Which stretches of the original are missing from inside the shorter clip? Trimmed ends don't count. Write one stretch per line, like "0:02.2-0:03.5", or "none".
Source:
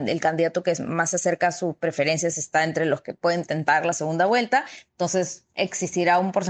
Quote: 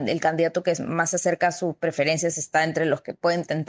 none